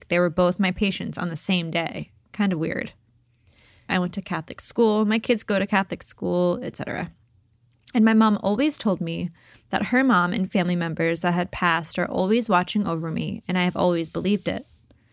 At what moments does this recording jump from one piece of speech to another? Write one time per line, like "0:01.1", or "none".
0:03.9